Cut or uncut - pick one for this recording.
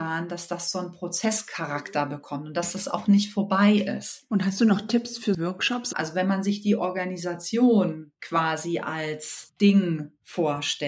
cut